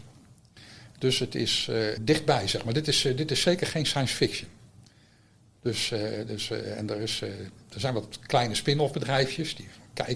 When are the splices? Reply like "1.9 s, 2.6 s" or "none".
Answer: 2.0 s